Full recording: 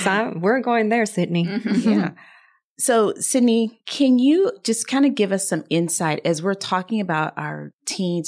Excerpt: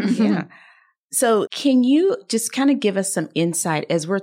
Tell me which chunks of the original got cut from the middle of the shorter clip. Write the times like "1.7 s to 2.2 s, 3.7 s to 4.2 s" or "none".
3.1 s to 3.8 s